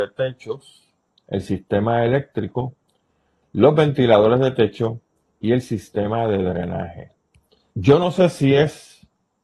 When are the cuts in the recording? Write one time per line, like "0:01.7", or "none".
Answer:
0:07.7